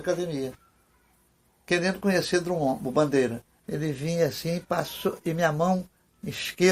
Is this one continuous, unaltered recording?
no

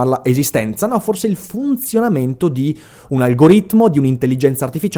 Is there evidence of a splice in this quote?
no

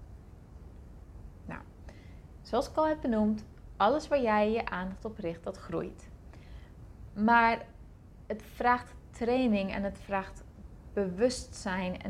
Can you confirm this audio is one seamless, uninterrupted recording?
yes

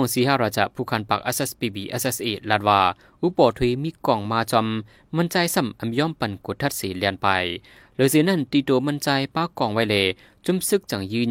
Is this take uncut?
yes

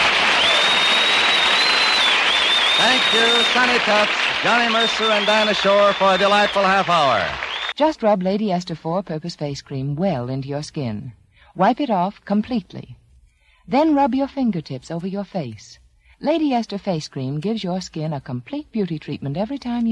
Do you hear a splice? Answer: yes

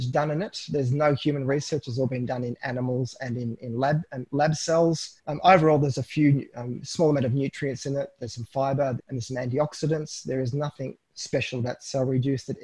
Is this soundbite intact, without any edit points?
no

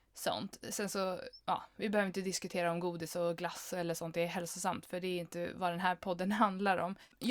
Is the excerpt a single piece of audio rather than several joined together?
yes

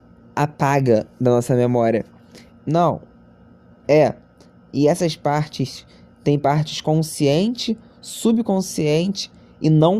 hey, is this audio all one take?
no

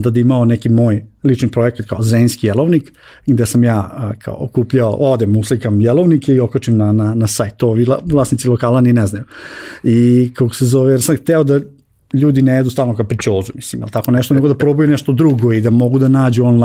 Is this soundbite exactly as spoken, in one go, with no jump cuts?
yes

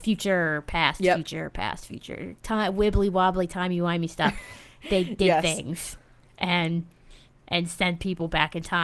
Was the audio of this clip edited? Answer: no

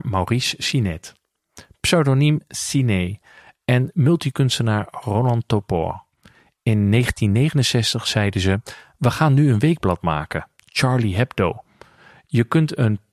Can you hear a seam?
no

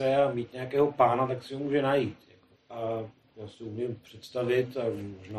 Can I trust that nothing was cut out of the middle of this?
no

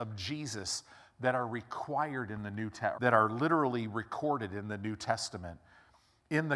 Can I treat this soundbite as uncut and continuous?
no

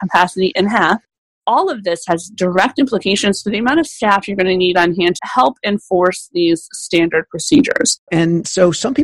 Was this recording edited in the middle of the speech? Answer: yes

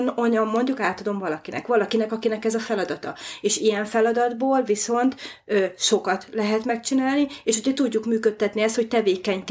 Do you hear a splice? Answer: no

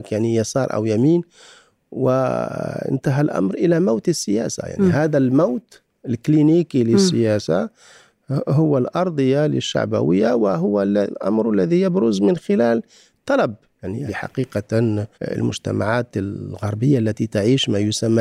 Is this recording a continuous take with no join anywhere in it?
no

